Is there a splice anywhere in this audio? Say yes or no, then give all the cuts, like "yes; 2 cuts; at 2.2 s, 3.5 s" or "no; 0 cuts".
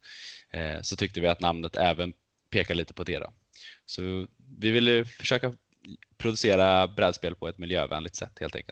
no; 0 cuts